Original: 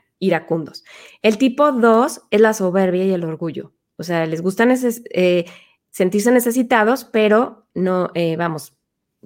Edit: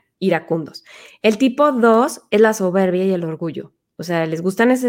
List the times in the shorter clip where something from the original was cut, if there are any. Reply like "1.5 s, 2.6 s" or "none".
none